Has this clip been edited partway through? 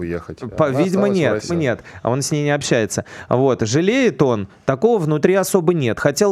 yes; 1 cut; at 1.5 s

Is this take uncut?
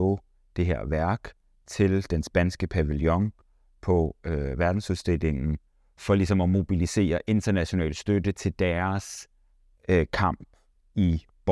yes; 0 cuts

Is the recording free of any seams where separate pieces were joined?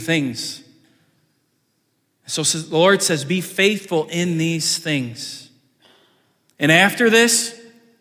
yes; 0 cuts

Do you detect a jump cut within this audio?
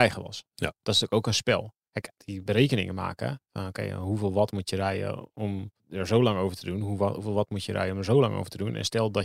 yes; 2 cuts; at 2.2 s, 5.8 s

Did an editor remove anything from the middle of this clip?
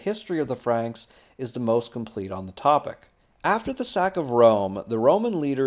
yes; 1 cut; at 3.2 s

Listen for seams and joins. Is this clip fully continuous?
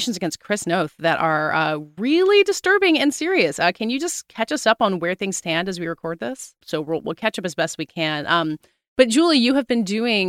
no; 1 cut; at 6.6 s

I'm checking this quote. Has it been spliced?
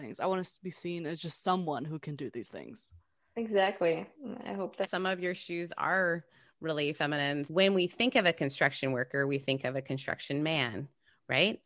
yes; 2 cuts; at 4.8 s, 7.5 s

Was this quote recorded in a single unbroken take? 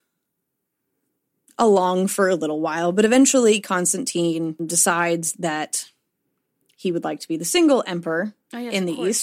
yes; 0 cuts

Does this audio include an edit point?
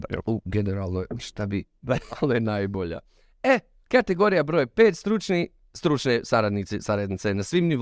no; 0 cuts

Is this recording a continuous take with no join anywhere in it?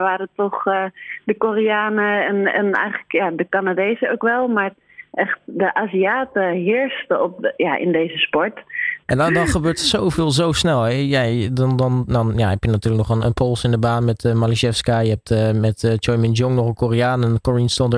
no; 1 cut; at 9.0 s

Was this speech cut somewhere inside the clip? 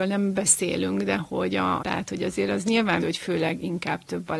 yes; 2 cuts; at 1.8 s, 3.0 s

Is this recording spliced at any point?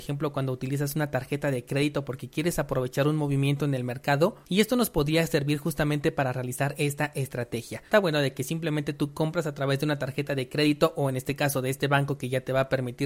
yes; 1 cut; at 7.9 s

